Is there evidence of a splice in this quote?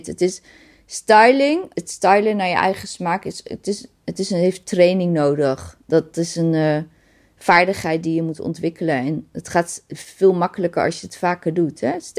yes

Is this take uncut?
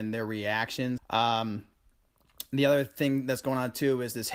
no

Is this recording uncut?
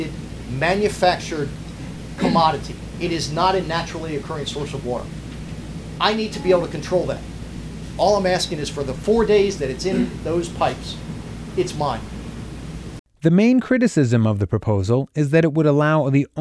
no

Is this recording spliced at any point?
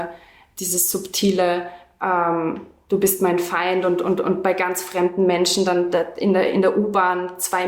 no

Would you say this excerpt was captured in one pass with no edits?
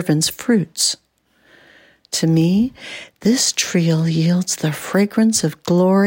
yes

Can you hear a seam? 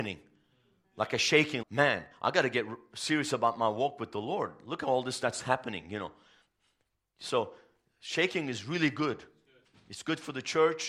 yes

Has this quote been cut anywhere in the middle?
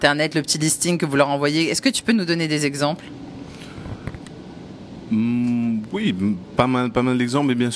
no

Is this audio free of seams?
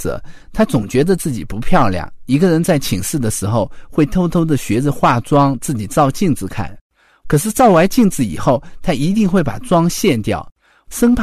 yes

